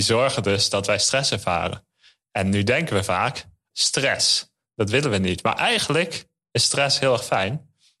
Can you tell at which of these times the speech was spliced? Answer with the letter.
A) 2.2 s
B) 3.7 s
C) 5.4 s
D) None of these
B